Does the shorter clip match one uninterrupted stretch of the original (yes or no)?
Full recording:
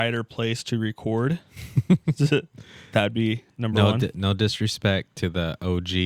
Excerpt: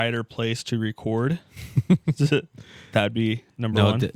yes